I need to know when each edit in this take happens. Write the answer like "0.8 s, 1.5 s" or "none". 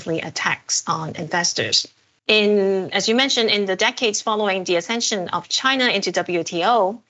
2.2 s